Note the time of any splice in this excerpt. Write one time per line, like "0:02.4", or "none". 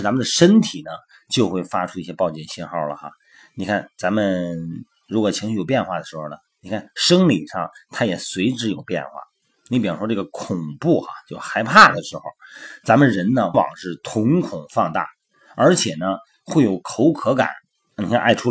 0:13.5

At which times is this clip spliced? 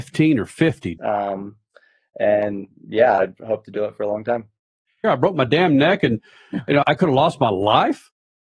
0:01.0
0:05.0
0:06.8

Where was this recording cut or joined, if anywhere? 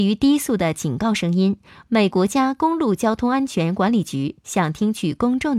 0:02.1

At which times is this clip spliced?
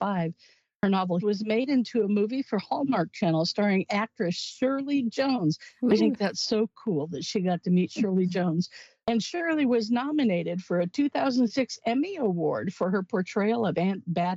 0:01.2
0:06.0

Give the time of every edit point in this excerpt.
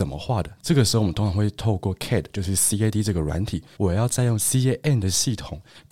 0:03.8

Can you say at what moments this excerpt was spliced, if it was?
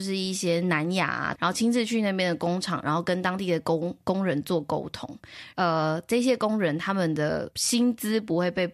0:01.4
0:05.5

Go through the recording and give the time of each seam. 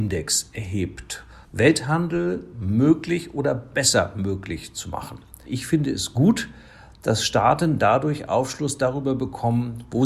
0:01.4
0:05.4

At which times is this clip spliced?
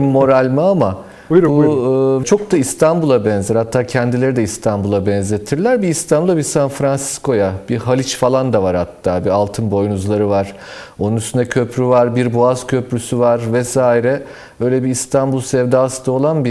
0:02.2

